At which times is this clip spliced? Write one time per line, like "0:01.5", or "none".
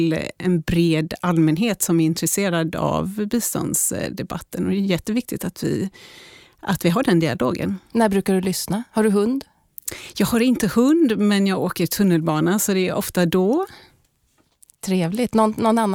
none